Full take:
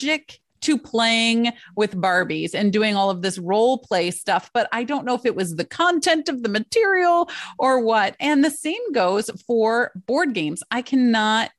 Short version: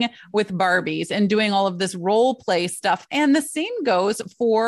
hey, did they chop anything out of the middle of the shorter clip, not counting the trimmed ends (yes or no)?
yes